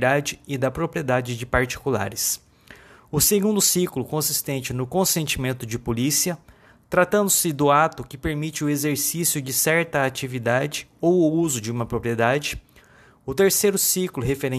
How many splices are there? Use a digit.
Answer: 0